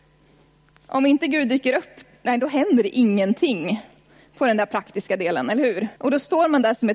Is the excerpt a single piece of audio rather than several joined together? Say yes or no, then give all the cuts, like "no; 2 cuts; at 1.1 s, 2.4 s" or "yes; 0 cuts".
no; 1 cut; at 6.0 s